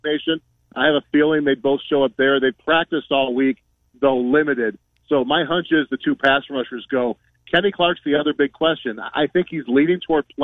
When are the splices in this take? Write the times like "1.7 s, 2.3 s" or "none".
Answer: none